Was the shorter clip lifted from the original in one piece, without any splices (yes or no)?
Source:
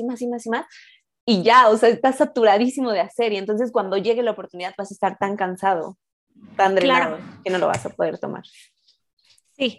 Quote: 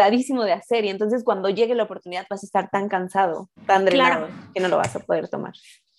no